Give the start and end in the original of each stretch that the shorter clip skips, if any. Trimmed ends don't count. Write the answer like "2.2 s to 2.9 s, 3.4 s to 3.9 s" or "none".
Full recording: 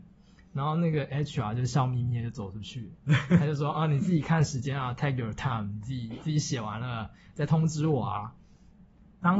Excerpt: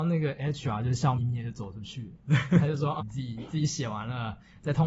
1.9 s to 2.0 s, 3.8 s to 5.7 s

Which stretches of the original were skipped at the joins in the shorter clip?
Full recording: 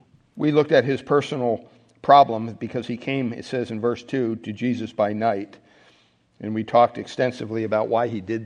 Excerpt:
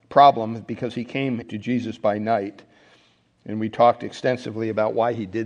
3.3 s to 4.4 s

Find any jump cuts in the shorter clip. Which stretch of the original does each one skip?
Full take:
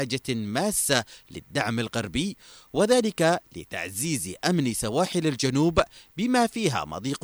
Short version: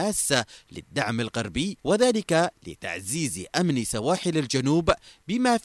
2.4 s to 2.7 s

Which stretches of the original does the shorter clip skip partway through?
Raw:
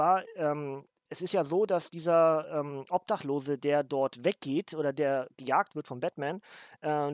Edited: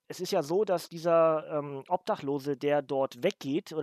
none

